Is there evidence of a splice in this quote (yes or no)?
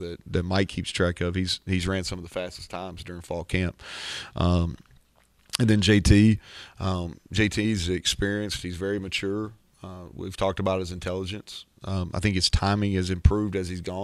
no